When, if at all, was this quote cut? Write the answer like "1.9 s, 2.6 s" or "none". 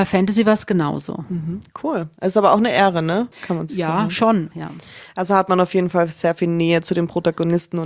3.3 s, 4.5 s